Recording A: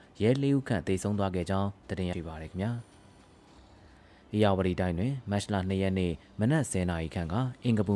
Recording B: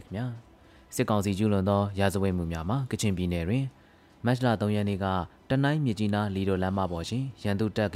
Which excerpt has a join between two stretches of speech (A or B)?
A